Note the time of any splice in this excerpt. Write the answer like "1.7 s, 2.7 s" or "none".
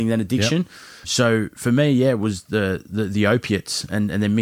1.0 s